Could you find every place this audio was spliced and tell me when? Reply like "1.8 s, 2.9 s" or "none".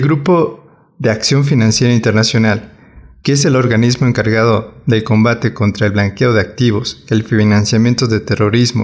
none